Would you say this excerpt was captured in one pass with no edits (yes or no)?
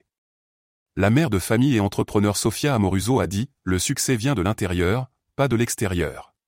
yes